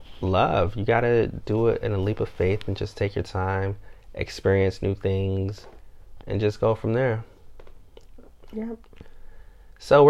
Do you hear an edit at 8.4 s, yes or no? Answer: no